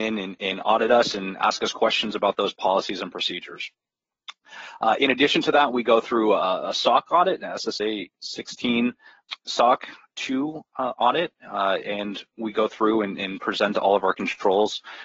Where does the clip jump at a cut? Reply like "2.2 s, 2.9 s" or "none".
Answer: none